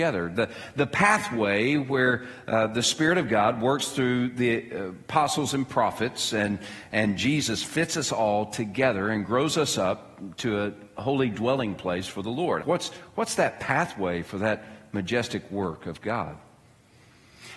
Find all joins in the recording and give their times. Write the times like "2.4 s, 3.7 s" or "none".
12.6 s